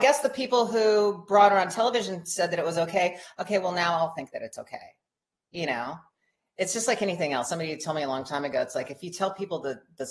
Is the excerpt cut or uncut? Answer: uncut